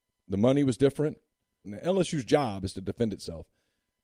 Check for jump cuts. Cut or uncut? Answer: cut